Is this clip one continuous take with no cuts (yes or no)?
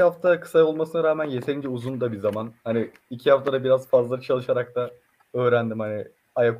yes